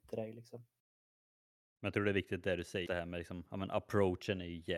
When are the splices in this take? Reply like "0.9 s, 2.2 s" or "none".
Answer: 2.9 s

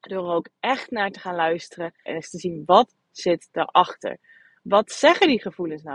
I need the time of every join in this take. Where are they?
2.1 s

